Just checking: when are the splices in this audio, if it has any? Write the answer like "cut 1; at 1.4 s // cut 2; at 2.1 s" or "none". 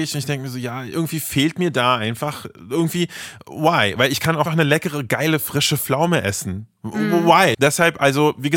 cut 1; at 4.5 s // cut 2; at 7.5 s